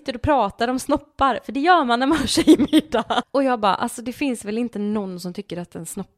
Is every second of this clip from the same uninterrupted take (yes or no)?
no